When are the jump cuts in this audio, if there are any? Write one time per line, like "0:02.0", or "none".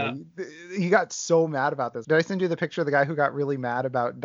0:02.0